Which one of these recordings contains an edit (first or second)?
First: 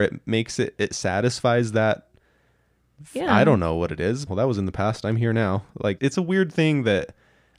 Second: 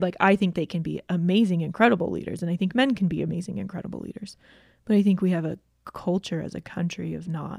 first